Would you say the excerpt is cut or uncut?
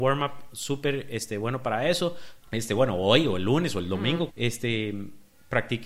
cut